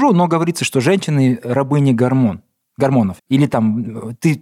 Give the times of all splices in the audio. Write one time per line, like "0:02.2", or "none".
0:03.2